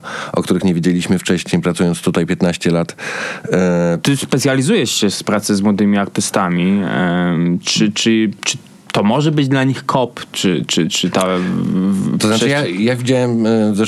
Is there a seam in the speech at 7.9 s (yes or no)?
no